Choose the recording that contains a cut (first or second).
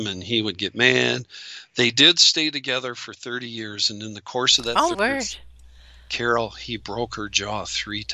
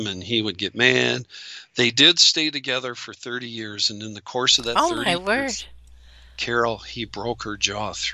first